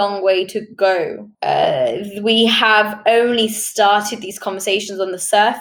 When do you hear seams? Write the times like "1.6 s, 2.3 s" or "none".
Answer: 1.3 s